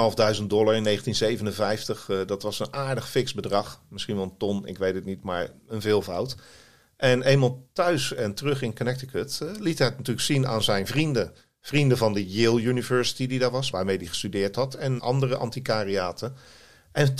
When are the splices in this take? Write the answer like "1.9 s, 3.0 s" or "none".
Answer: 13.7 s, 15.0 s